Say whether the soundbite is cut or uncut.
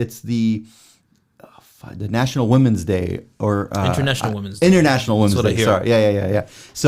uncut